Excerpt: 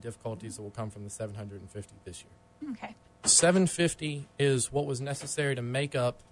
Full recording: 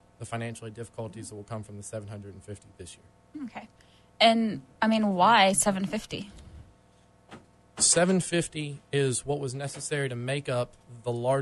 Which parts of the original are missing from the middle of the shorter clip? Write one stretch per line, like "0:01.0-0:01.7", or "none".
0:03.8-0:07.6

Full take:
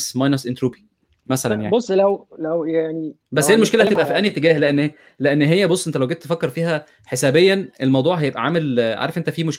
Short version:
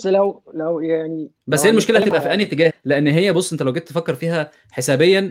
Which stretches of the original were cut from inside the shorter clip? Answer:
0:04.5-0:05.0

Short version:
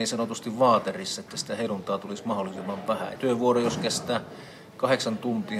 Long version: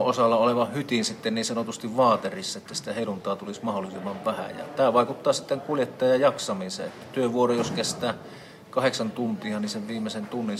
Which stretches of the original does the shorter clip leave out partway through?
0:04.5-0:07.1

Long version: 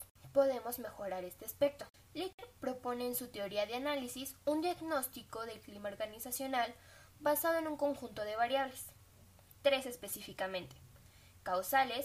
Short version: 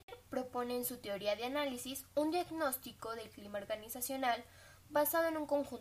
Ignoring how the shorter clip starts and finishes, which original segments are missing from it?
none

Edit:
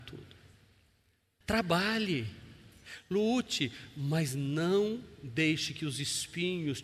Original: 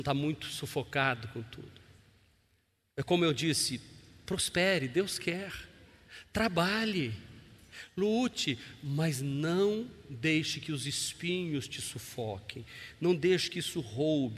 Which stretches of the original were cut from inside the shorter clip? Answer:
0:02.9-0:06.3

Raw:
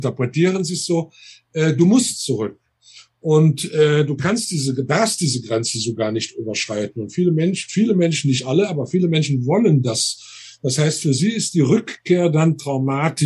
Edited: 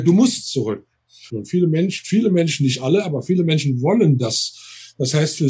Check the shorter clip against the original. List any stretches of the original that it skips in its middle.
0:03.0-0:06.9

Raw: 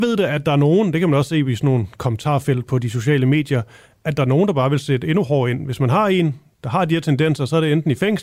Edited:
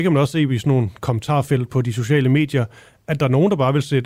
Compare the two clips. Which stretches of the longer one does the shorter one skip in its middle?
none

